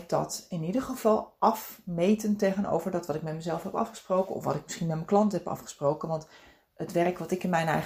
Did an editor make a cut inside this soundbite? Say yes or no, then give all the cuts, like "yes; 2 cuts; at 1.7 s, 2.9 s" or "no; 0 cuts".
no; 0 cuts